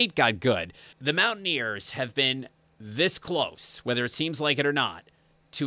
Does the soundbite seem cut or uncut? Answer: cut